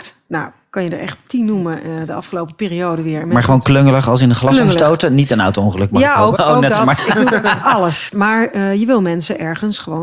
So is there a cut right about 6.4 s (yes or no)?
yes